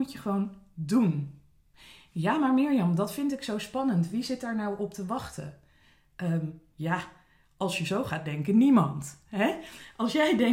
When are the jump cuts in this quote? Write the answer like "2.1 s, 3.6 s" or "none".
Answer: none